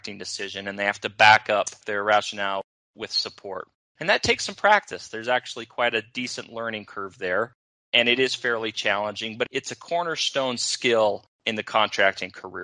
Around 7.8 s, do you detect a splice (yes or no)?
no